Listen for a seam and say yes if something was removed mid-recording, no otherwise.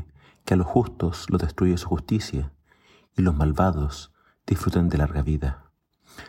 no